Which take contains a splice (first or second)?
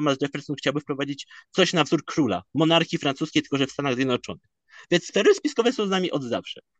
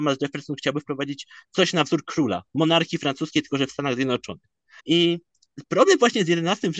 second